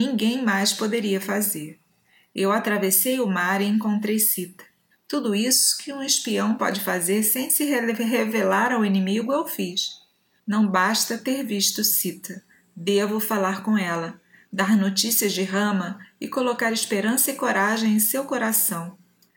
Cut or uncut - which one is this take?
cut